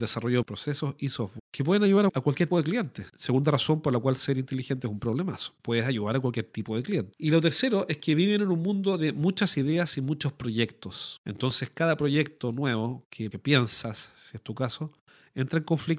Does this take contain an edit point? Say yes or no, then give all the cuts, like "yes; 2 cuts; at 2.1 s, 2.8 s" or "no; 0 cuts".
yes; 1 cut; at 2.5 s